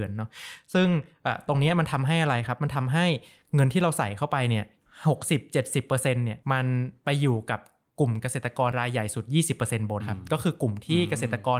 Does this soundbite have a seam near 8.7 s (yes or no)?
yes